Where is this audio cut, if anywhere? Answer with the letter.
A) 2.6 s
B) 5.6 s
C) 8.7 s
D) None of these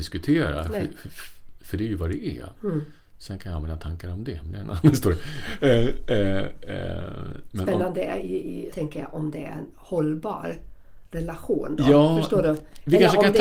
C